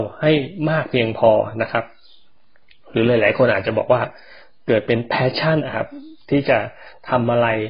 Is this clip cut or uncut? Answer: cut